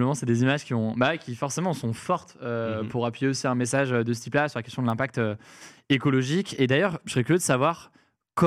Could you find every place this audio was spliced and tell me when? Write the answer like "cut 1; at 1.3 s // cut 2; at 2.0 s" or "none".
none